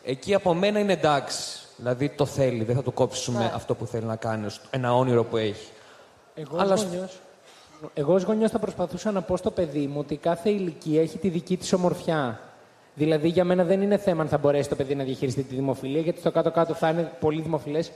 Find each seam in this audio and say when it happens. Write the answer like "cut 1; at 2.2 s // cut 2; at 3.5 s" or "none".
none